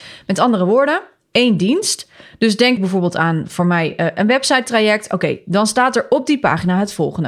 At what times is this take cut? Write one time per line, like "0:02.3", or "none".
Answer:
0:02.8